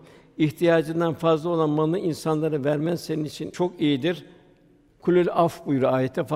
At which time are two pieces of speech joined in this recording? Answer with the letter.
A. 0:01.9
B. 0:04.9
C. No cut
B